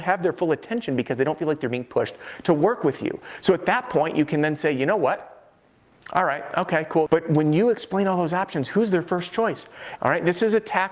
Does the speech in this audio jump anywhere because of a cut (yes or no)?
yes